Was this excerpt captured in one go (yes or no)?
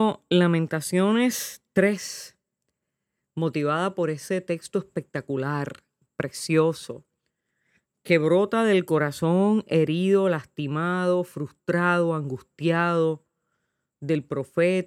yes